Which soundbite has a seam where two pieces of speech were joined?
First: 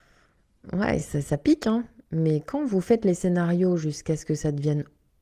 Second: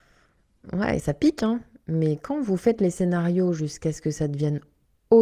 second; 1 cut; at 1.0 s

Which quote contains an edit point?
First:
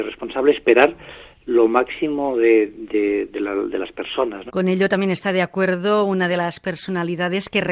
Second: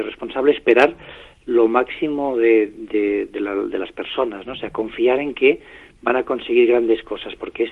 first; 1 cut; at 4.5 s

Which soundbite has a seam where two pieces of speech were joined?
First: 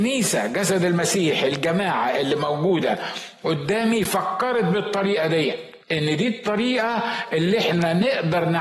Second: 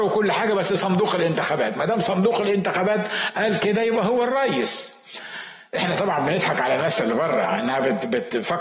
first; 1 cut; at 5.8 s

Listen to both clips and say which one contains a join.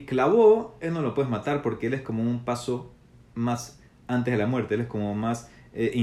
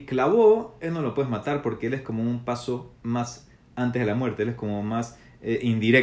second; 1 cut; at 2.9 s

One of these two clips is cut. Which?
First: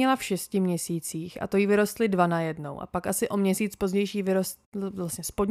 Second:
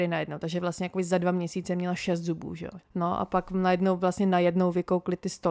second; 1 cut; at 2.8 s

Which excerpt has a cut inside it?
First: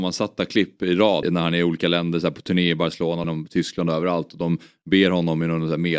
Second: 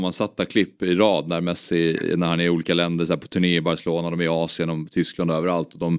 first; 2 cuts; at 1.2 s, 3.2 s

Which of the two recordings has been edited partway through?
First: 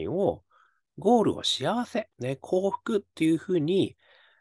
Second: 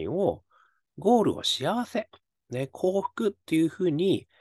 first; 1 cut; at 2.1 s

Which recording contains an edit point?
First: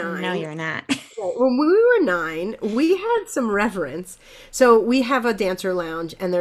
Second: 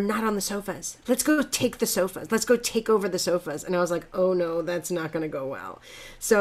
second; 1 cut; at 1.0 s

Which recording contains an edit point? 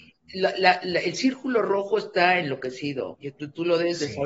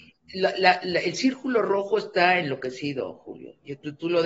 first; 1 cut; at 3.1 s

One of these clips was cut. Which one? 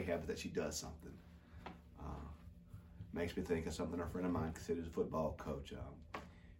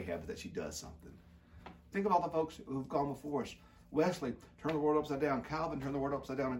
second; 1 cut; at 1.9 s

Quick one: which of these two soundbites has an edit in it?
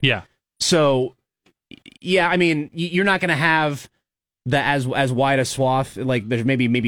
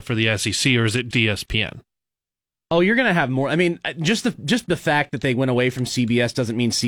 second; 1 cut; at 1.1 s

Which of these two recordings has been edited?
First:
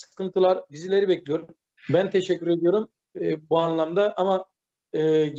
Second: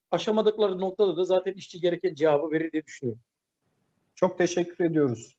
first; 2 cuts; at 1.8 s, 3.2 s

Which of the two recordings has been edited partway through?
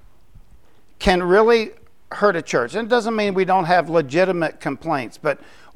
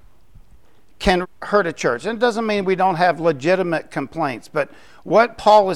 second; 1 cut; at 1.2 s

